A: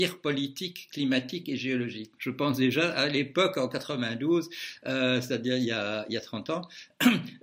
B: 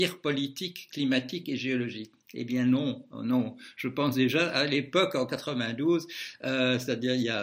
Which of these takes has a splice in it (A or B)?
A